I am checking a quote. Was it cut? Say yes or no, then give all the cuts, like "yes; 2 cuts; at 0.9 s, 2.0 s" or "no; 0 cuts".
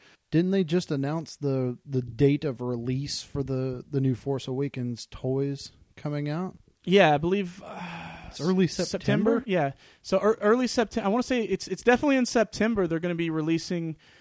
no; 0 cuts